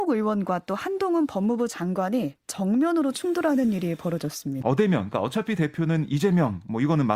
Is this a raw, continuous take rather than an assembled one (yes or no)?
no